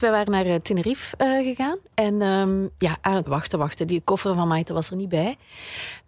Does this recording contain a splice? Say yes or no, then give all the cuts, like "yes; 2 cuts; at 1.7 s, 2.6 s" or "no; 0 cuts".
yes; 1 cut; at 3.3 s